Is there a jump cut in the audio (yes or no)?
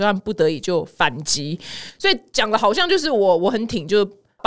no